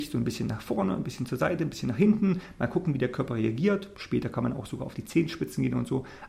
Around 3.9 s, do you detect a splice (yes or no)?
no